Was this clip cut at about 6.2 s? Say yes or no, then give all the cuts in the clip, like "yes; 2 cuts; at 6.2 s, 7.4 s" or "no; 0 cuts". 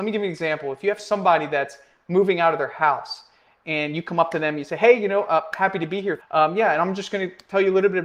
yes; 1 cut; at 6.2 s